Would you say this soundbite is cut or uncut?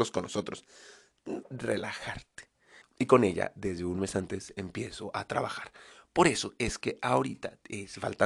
cut